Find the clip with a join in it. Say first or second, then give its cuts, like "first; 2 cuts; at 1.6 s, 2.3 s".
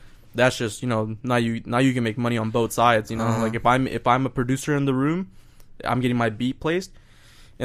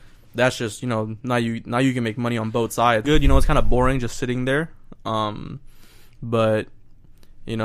second; 1 cut; at 3.0 s